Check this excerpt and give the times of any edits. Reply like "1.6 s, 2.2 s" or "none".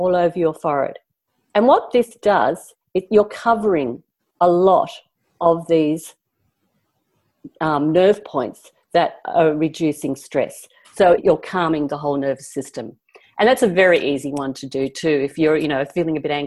11.2 s